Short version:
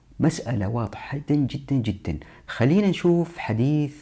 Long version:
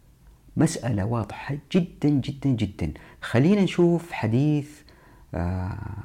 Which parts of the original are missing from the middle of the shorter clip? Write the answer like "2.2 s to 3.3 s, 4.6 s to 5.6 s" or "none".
1.6 s to 2.0 s